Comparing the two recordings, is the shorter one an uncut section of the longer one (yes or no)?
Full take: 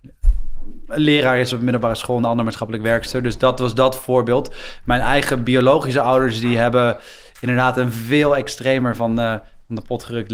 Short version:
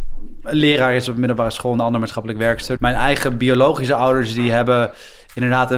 no